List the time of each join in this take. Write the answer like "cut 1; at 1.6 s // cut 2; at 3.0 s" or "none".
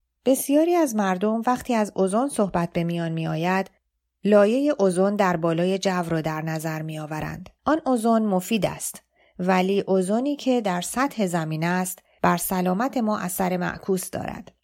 cut 1; at 7.6 s